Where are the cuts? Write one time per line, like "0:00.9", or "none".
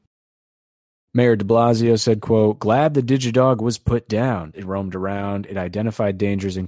0:04.5